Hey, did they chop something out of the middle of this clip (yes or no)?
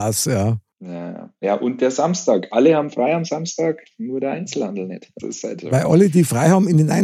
yes